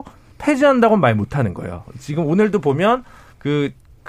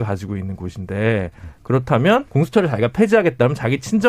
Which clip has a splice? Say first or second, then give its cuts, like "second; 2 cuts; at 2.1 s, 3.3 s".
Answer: second; 1 cut; at 2.3 s